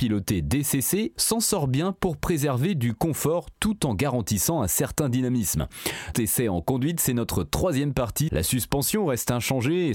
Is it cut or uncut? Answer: cut